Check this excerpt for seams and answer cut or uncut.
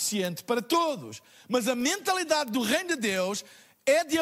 uncut